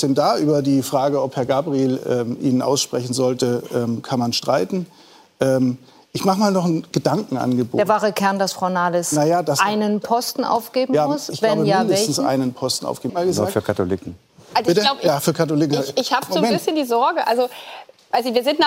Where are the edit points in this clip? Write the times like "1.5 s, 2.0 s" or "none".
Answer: 13.1 s